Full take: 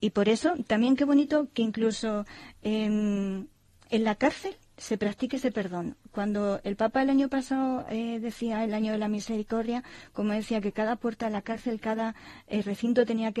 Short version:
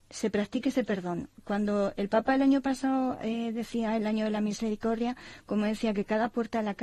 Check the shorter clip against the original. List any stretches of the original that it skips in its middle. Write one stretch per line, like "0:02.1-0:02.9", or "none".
none